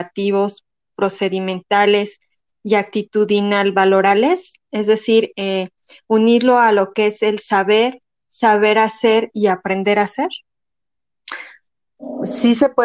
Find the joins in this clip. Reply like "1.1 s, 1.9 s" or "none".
none

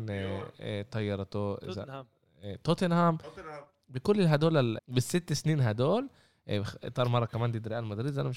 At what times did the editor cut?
4.8 s

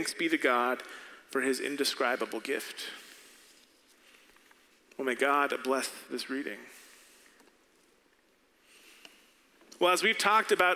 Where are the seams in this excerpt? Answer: none

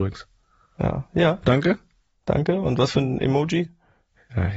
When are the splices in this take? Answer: 1.1 s

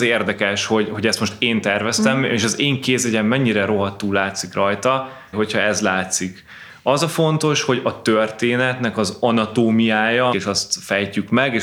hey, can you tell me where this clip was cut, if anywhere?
5.3 s, 10.3 s

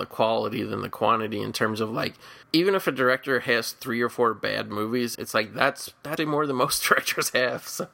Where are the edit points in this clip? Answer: 2.4 s, 5.1 s, 6.2 s

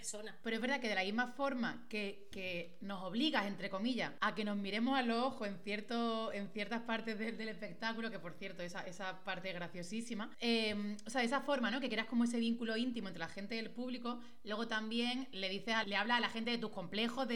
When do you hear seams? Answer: 15.8 s

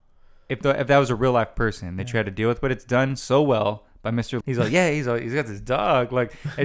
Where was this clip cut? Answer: 4.4 s

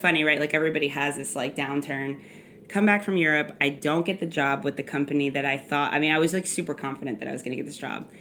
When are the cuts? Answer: none

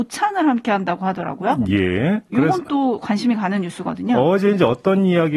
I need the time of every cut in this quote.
none

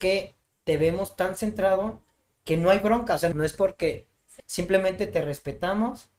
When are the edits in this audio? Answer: 3.3 s, 4.4 s

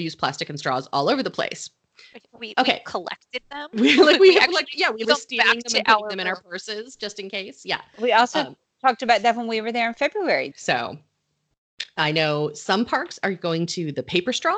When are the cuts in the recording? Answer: 5.0 s, 10.5 s

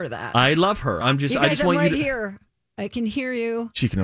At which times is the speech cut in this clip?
1.0 s

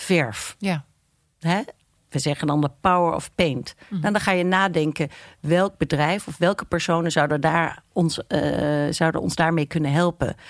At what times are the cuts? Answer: none

